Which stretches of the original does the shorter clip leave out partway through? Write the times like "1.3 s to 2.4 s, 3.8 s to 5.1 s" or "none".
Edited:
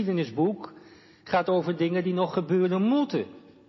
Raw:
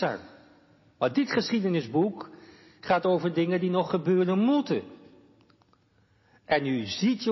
none